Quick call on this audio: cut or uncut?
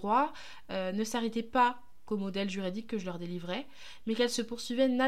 uncut